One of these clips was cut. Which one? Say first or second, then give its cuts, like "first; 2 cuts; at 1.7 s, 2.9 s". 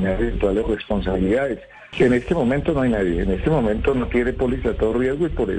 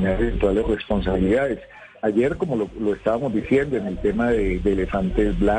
first; 1 cut; at 1.9 s